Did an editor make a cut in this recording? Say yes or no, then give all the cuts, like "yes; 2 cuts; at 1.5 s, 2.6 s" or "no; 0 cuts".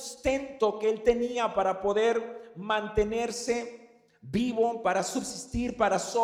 no; 0 cuts